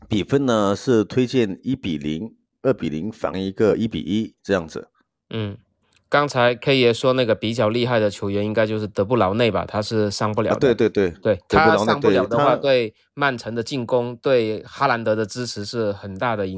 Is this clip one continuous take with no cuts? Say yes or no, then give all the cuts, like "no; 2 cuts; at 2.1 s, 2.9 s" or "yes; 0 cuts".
yes; 0 cuts